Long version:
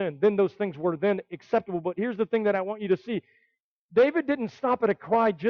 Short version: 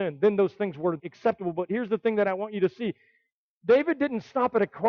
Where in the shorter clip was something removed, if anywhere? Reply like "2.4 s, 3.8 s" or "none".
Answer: 1.0 s

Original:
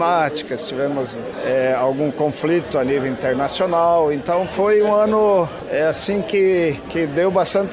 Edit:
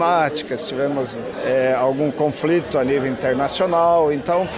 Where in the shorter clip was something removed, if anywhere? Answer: none

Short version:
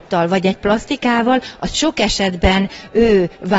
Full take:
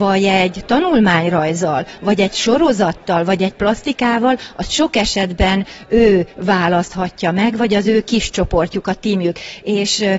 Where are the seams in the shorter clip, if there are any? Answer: none

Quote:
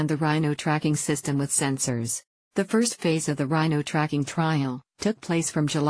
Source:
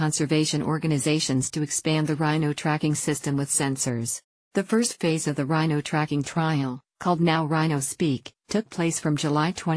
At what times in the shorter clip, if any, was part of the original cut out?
4.9 s

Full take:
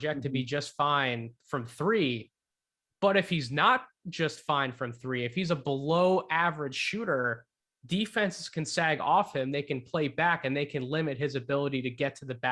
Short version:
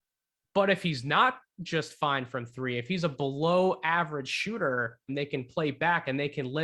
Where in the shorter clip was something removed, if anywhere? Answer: 5.1 s

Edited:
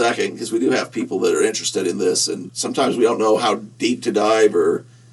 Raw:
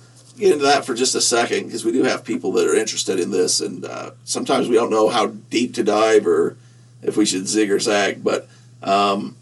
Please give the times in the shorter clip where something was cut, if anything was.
2.5 s

